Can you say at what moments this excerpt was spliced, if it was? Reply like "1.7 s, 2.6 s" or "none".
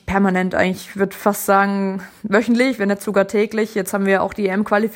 none